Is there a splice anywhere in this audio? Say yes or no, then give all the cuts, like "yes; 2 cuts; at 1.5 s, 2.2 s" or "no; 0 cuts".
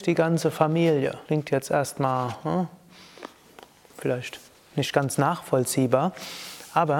yes; 1 cut; at 1.2 s